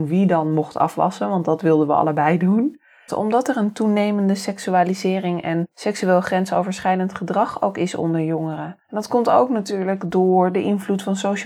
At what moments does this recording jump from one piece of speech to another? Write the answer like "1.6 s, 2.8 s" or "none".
3.1 s, 8.8 s